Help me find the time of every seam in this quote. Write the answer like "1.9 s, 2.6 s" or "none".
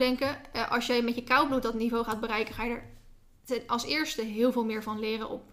none